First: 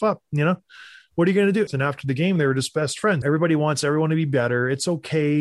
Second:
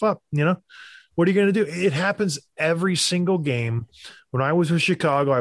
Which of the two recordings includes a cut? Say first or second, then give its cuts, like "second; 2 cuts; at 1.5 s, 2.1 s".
first; 2 cuts; at 1.7 s, 3.2 s